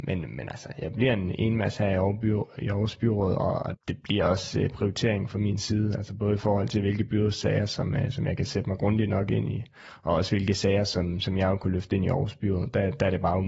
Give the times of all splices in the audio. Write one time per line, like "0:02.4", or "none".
0:03.7